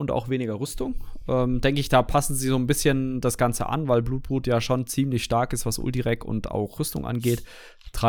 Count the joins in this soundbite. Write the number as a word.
zero